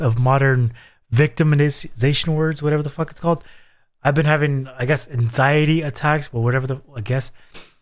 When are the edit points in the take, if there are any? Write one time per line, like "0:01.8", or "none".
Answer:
none